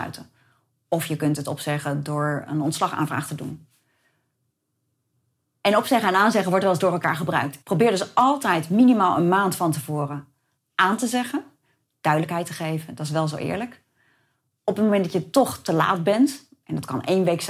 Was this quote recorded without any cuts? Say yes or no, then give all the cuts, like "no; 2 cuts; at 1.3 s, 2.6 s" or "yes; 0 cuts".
no; 1 cut; at 7.6 s